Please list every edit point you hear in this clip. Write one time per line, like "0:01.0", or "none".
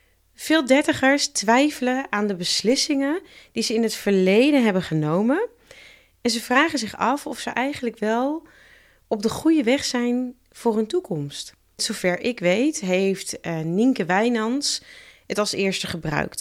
0:11.8